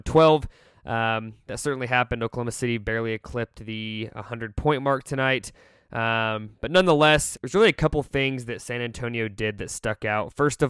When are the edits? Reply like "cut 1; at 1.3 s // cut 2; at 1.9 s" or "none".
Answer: cut 1; at 7.3 s